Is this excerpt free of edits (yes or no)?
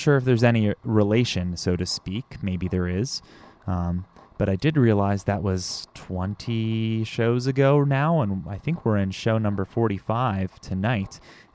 yes